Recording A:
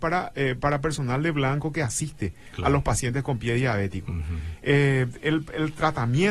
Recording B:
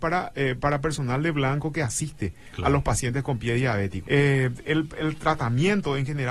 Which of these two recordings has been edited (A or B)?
B